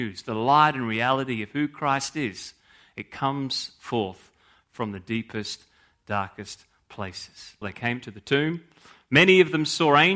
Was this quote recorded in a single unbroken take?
no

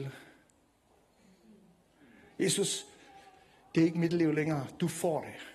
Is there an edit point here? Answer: no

